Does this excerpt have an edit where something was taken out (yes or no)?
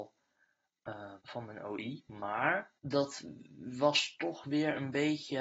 yes